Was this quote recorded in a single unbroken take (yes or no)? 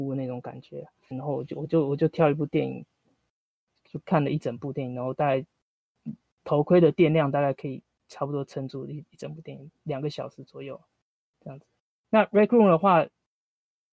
no